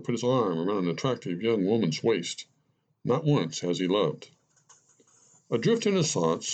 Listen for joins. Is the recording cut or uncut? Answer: uncut